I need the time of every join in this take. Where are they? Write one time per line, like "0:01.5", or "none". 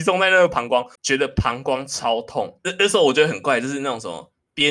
0:01.0
0:02.6